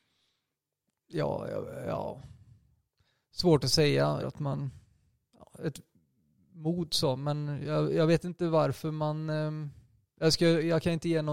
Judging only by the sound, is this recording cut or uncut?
cut